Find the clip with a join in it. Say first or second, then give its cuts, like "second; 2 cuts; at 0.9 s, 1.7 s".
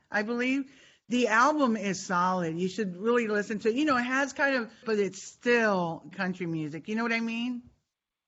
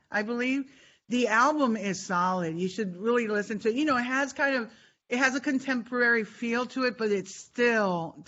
first; 2 cuts; at 4.8 s, 6.1 s